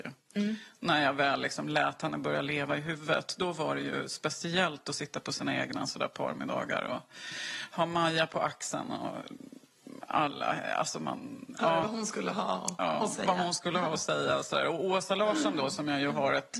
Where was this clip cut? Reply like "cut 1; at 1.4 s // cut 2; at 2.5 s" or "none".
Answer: none